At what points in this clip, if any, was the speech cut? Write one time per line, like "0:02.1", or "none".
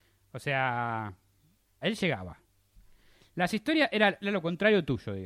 0:01.8